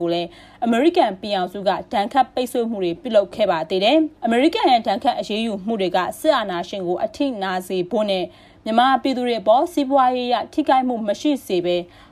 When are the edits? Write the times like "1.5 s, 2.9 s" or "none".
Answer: 4.2 s